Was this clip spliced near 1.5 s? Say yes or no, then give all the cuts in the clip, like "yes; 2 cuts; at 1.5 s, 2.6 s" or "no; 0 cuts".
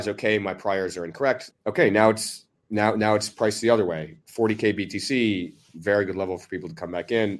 yes; 1 cut; at 1.5 s